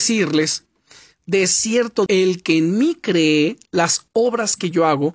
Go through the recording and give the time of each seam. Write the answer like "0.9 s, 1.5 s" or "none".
2.1 s